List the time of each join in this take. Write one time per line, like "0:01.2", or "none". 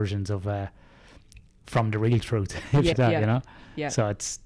0:02.9